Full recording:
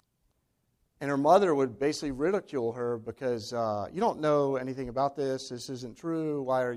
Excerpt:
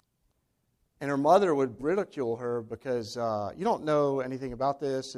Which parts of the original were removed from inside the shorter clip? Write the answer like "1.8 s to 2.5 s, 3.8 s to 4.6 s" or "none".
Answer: 1.8 s to 2.1 s

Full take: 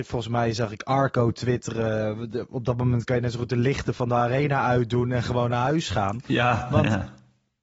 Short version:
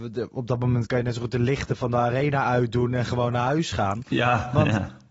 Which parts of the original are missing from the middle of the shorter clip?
none

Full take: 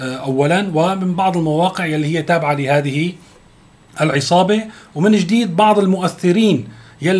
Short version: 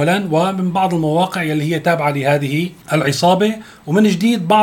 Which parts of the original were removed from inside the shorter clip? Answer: 3.2 s to 3.9 s

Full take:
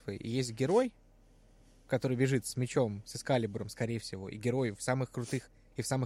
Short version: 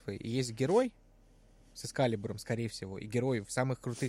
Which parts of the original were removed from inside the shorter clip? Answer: 1.7 s to 3.0 s

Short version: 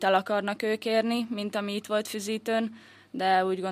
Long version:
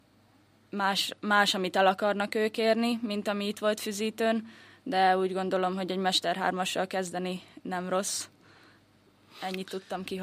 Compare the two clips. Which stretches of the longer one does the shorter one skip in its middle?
none

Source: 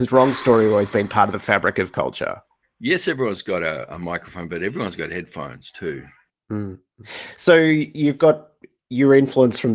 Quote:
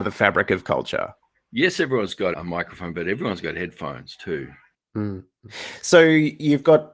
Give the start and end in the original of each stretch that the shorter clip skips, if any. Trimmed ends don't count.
3.6 s to 3.9 s

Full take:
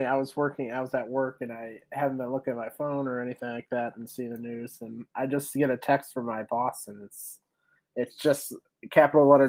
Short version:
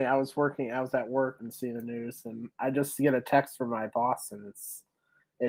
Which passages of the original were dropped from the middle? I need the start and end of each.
1.4 s to 3.9 s

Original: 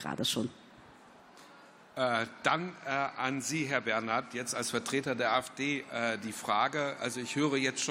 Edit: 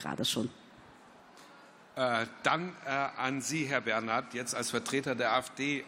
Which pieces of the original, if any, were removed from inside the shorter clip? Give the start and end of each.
none

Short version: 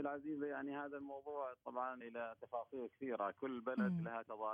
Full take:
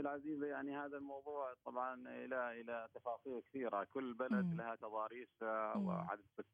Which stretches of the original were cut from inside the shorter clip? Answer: 2.0 s to 2.5 s

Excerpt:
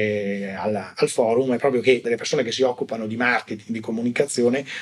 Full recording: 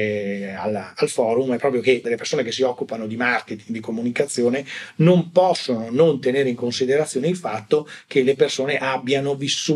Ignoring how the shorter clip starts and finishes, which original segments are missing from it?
none

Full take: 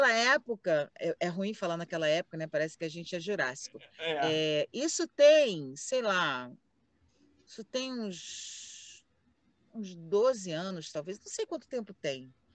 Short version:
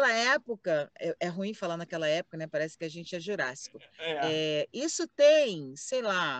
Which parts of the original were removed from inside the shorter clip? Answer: none

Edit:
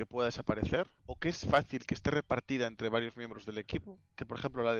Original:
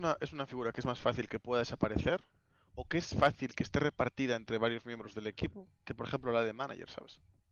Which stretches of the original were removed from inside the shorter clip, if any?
2.3 s to 2.7 s

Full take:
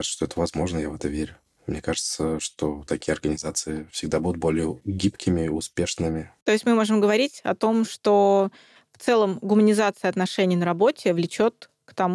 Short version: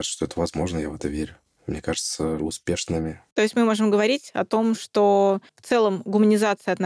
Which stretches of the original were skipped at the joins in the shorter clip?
2.4 s to 5.5 s, 8.6 s to 8.9 s

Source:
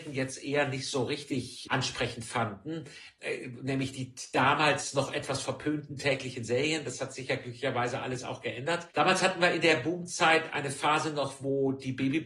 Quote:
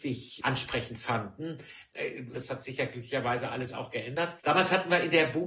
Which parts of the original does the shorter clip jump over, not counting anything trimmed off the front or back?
3.6 s to 6.8 s

